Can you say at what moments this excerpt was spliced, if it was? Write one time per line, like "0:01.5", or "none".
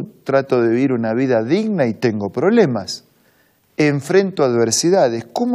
none